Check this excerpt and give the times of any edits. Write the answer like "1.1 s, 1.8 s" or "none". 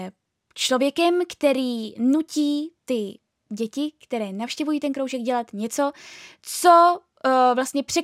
none